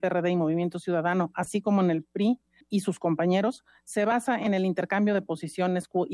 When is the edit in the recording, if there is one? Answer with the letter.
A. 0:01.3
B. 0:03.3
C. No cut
C